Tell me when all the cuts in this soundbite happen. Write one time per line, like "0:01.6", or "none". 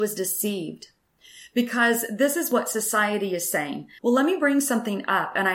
0:04.0

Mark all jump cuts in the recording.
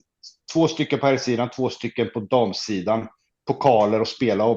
none

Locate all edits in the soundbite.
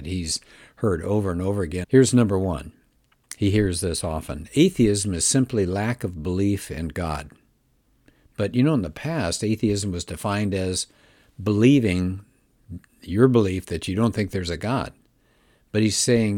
0:01.8

